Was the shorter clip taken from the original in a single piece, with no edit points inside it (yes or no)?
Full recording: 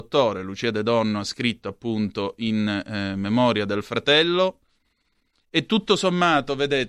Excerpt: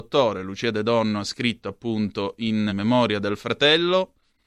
no